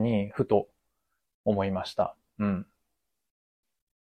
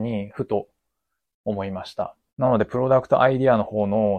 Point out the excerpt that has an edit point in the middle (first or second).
second